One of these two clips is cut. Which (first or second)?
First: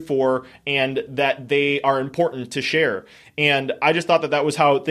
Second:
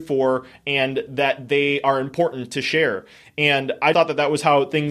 second